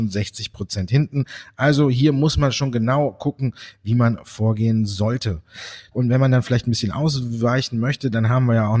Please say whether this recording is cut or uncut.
cut